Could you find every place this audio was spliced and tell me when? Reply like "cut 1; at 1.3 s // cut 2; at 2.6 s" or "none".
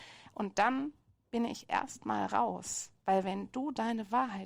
none